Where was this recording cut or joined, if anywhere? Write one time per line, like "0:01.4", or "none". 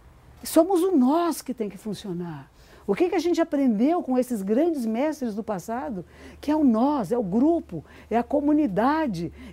none